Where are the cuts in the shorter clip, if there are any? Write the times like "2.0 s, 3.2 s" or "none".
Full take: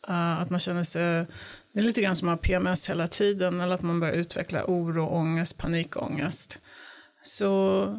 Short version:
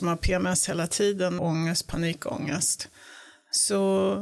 1.4 s

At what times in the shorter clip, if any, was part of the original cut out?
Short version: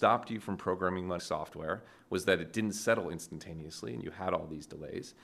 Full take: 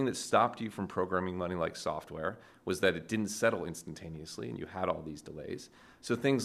1.2 s

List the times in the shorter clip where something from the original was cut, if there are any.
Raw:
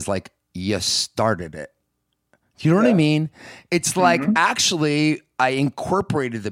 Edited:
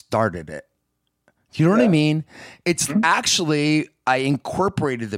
2.9 s

